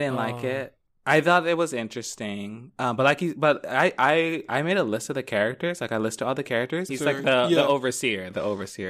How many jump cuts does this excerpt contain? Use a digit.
1